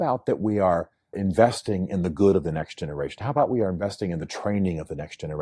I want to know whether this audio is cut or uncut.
cut